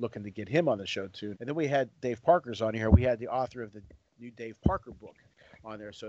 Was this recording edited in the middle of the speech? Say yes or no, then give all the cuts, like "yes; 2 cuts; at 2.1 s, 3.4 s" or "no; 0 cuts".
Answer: yes; 1 cut; at 1.4 s